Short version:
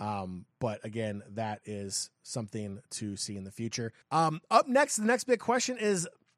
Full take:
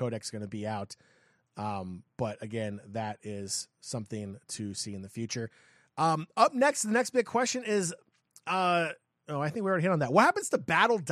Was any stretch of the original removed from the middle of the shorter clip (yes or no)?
yes